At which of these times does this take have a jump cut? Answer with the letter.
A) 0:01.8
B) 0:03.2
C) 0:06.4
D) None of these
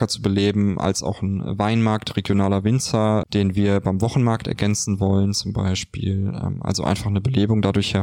B